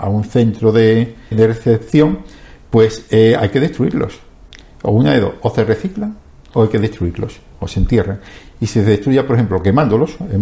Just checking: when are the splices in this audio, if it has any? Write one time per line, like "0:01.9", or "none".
0:01.3